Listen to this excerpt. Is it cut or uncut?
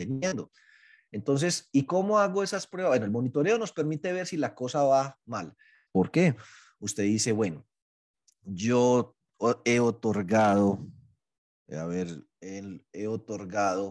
cut